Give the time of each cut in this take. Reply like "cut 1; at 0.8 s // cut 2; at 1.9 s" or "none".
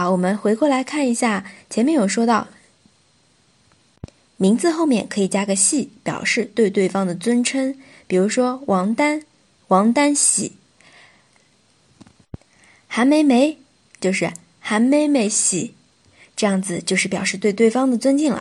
none